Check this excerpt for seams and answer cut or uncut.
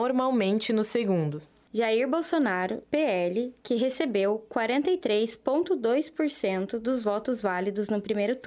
cut